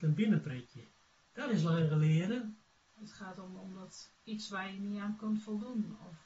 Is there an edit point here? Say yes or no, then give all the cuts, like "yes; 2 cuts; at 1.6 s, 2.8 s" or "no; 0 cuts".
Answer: yes; 3 cuts; at 1.2 s, 2.9 s, 4.1 s